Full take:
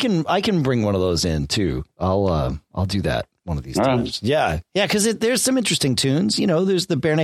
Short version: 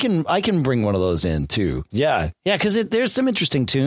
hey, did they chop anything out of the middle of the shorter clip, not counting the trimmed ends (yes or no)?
yes